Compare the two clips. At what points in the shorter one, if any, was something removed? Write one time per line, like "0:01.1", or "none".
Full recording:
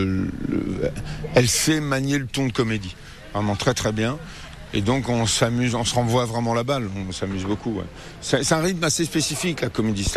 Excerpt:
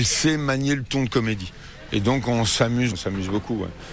0:01.9
0:02.9